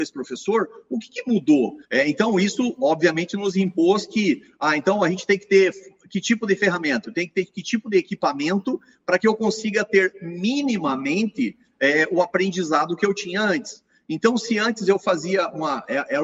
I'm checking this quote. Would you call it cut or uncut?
cut